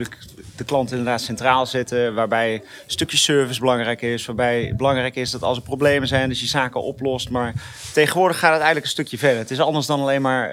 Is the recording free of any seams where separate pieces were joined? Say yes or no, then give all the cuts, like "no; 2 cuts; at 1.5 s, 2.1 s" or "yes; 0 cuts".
yes; 0 cuts